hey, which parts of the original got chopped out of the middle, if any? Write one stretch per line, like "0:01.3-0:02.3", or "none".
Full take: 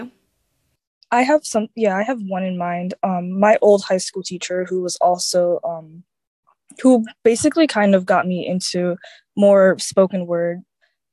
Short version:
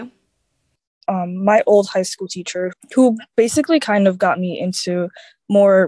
0:01.1-0:03.0
0:04.7-0:06.6